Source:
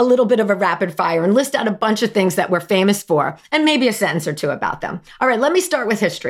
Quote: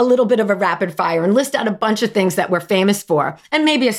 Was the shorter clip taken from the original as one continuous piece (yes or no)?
yes